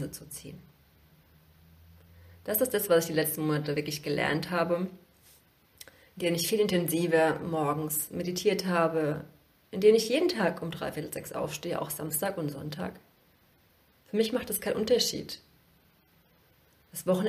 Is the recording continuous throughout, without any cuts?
yes; 0 cuts

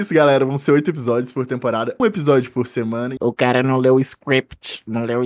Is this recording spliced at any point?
yes; 2 cuts; at 2.0 s, 3.2 s

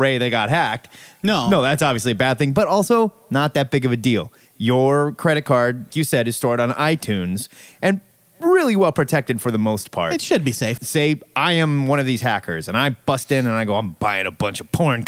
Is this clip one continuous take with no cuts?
no; 1 cut; at 5.9 s

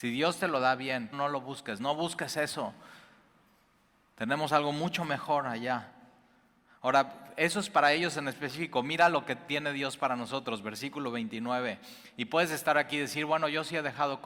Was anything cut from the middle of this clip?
yes; 1 cut; at 1.1 s

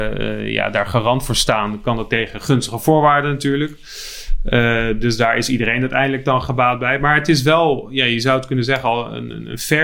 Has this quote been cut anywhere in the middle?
no; 0 cuts

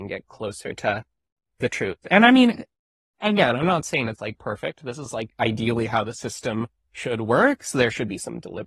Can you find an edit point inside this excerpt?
no; 0 cuts

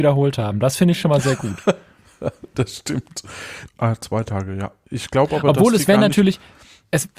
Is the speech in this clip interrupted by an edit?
yes; 1 cut; at 3.7 s

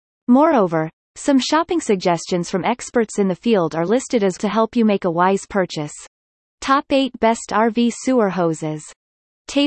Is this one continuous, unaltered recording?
no; 1 cut; at 4.4 s

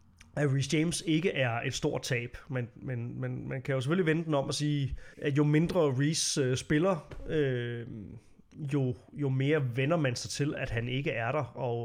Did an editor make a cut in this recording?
yes; 1 cut; at 5.1 s

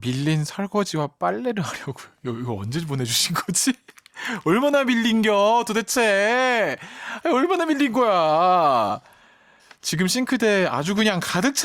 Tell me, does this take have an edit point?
no; 0 cuts

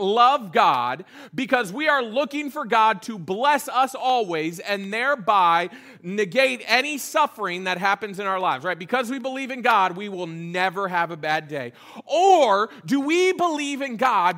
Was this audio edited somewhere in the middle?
no; 0 cuts

